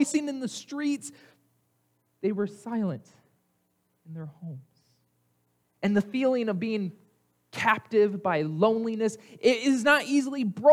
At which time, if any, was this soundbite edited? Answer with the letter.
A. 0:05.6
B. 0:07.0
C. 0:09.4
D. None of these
A